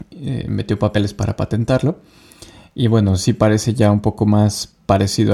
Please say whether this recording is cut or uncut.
uncut